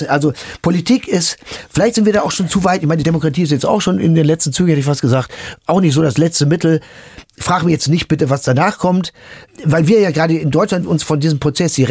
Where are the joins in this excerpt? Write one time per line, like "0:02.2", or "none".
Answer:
none